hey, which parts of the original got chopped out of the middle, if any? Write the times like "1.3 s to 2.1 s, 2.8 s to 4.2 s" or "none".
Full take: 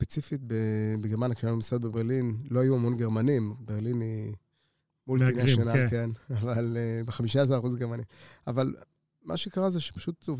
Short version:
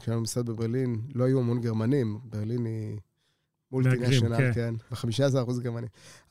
6.3 s to 7.1 s